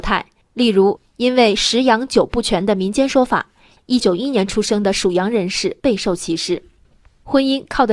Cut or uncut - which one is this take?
cut